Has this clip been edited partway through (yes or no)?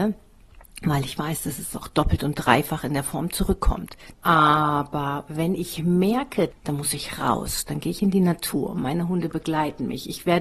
yes